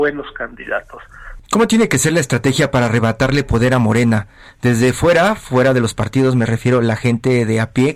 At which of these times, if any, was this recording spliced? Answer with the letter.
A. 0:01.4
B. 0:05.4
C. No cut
A